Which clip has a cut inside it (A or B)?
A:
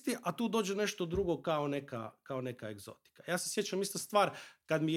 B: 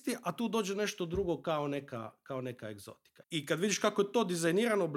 B